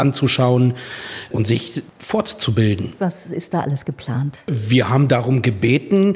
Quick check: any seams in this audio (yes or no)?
yes